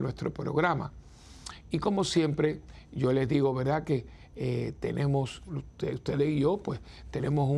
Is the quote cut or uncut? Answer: cut